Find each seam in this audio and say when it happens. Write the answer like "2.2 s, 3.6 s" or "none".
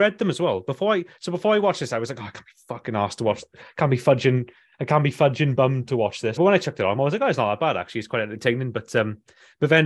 6.4 s